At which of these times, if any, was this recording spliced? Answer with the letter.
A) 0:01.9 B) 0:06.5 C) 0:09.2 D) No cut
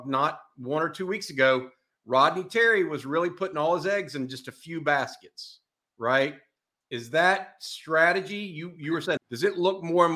C